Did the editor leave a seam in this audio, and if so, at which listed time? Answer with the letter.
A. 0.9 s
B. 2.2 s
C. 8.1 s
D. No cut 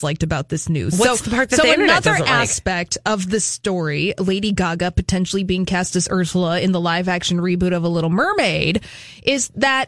D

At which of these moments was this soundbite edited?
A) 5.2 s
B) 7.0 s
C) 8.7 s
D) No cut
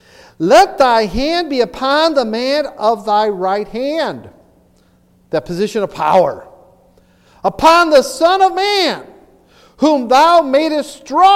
D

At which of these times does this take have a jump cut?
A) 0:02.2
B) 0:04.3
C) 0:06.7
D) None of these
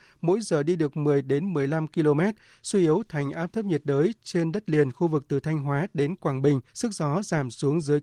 C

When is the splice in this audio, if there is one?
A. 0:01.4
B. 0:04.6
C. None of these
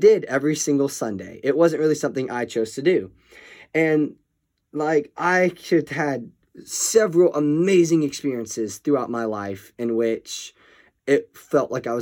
C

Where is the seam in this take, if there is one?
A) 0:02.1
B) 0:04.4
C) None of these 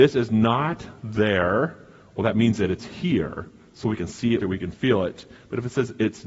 B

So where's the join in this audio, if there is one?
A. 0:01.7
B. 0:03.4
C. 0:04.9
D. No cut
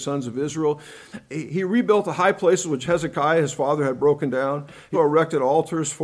C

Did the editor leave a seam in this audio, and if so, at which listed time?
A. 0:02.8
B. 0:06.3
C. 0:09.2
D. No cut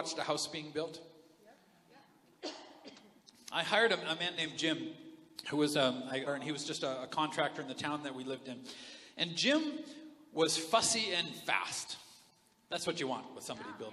B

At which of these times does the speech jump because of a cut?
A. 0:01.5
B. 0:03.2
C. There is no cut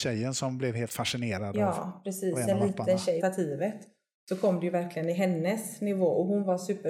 B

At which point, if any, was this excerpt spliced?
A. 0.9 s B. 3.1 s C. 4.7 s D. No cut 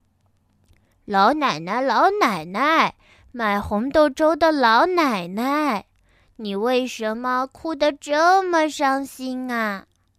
A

